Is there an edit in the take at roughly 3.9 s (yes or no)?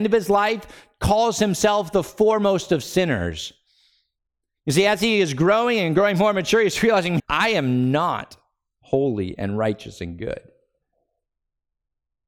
no